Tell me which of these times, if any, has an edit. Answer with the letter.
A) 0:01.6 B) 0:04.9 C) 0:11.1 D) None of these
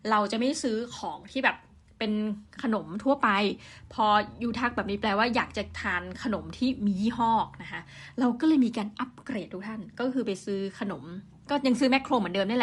D